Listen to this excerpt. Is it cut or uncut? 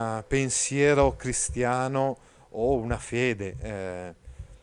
uncut